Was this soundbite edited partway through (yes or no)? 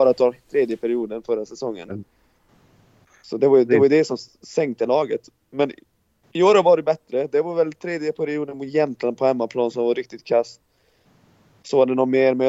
no